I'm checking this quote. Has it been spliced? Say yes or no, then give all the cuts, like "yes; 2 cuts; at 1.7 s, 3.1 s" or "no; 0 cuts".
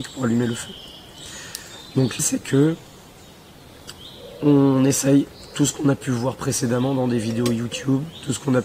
yes; 1 cut; at 2.2 s